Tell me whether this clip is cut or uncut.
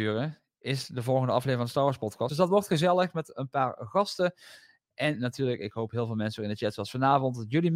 cut